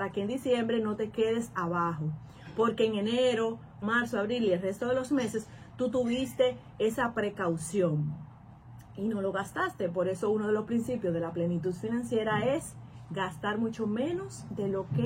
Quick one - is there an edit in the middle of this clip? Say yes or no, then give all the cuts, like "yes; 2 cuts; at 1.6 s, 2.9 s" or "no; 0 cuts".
yes; 1 cut; at 3.8 s